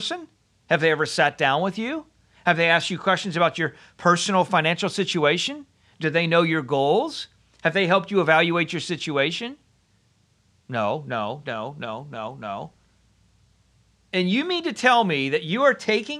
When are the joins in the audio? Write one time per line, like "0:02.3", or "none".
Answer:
0:11.4